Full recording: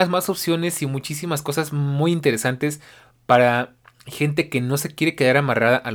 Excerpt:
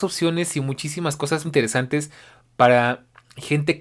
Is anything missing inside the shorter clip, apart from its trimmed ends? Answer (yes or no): yes